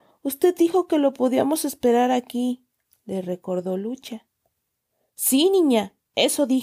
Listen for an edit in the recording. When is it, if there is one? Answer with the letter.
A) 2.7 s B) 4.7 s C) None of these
C